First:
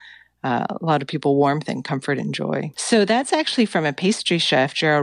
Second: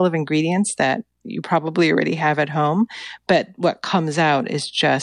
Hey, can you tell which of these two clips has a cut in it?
first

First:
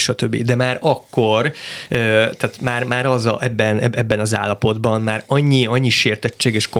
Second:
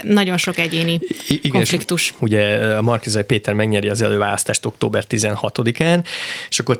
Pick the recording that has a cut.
second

